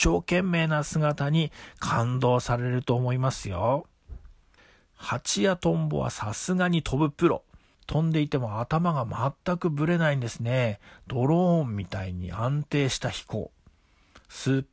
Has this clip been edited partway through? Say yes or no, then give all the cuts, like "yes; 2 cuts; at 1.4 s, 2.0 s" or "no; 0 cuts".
no; 0 cuts